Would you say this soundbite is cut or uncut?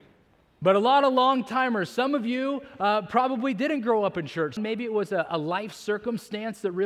cut